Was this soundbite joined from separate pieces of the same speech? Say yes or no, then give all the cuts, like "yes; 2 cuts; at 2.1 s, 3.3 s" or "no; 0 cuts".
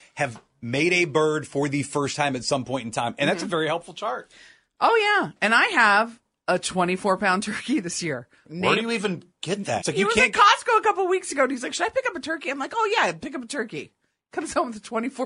yes; 2 cuts; at 8.4 s, 9.8 s